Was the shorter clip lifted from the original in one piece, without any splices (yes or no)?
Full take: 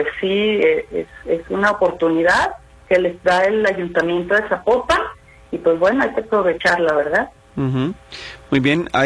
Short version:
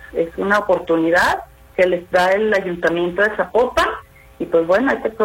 yes